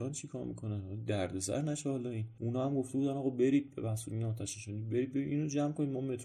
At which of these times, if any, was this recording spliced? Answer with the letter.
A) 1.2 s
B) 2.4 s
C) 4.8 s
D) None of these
D